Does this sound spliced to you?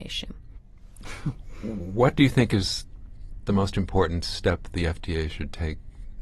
yes; 1 cut; at 1.0 s

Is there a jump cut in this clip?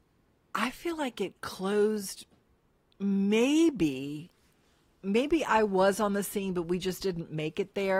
no; 0 cuts

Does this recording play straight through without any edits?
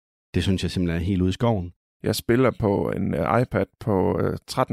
no; 1 cut; at 1.9 s

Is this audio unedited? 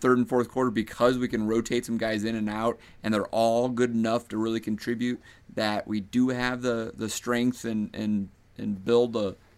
yes; 0 cuts

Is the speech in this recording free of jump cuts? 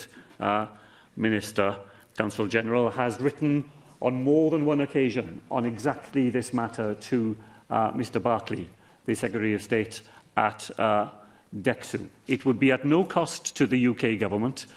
no; 1 cut; at 12.3 s

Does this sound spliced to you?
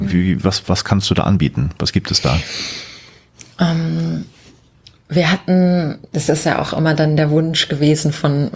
no; 0 cuts

